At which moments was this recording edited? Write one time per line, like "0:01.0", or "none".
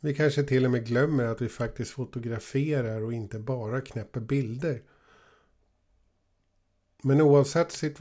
none

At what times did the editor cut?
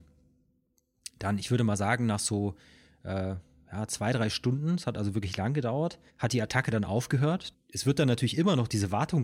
0:06.1
0:07.5

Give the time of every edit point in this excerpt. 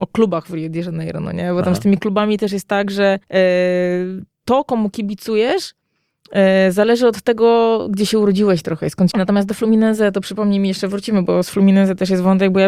0:03.2
0:09.1

